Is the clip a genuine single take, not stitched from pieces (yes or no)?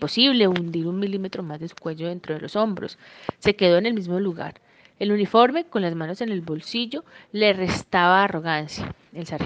yes